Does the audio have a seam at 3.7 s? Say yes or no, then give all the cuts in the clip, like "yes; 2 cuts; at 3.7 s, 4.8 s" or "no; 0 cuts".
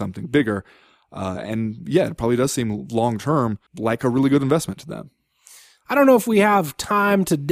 yes; 1 cut; at 3.7 s